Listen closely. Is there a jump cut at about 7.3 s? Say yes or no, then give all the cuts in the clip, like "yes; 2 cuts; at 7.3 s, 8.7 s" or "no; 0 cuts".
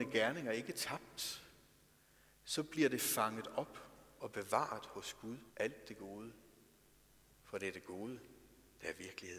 no; 1 cut; at 5.5 s